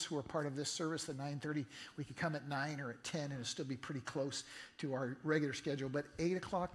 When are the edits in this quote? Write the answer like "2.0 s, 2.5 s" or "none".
none